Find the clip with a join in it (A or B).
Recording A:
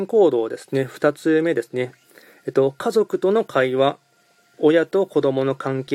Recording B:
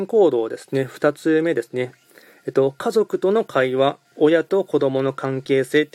B